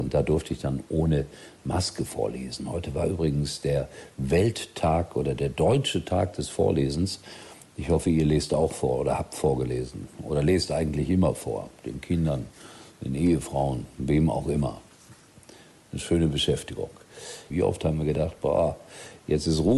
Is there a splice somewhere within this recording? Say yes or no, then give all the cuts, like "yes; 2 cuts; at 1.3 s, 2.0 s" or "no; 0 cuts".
yes; 1 cut; at 17.5 s